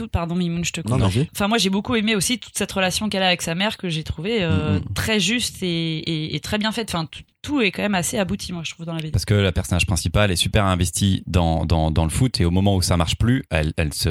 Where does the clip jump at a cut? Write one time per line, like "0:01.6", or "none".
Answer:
none